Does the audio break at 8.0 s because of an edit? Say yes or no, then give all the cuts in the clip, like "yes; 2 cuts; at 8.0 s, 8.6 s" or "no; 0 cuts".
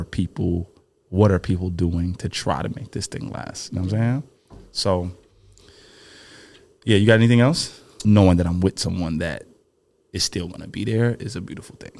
yes; 1 cut; at 8.0 s